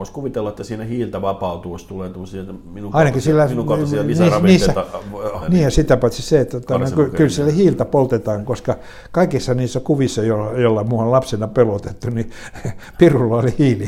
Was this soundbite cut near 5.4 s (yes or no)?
yes